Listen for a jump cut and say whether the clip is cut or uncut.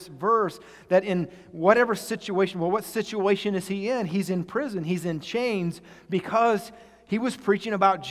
uncut